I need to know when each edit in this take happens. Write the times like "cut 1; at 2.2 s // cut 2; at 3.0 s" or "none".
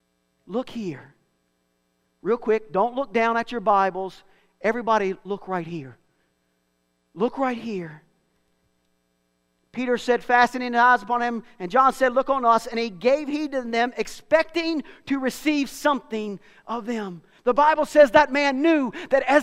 none